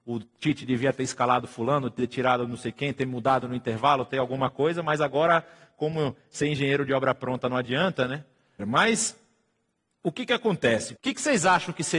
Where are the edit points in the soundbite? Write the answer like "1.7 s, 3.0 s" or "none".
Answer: 8.6 s, 11.0 s